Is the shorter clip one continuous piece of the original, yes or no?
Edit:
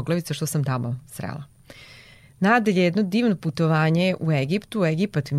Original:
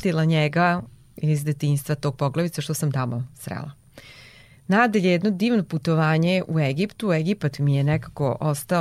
yes